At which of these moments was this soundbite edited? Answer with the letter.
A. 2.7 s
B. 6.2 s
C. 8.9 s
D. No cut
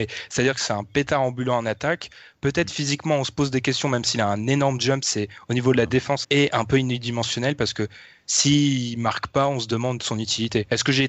B